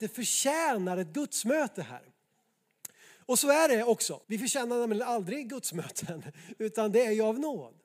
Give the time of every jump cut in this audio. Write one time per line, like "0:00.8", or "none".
0:04.2